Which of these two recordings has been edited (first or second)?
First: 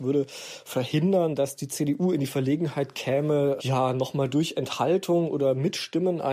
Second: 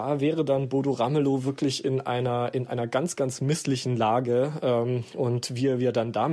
first